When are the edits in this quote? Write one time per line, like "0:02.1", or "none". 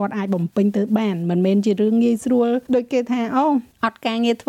0:02.7